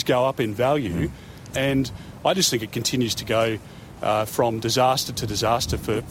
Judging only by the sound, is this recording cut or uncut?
cut